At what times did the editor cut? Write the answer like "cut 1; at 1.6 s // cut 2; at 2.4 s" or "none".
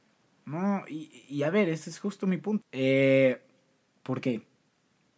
cut 1; at 2.6 s